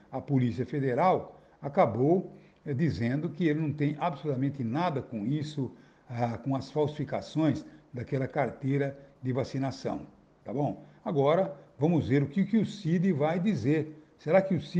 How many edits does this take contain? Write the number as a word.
zero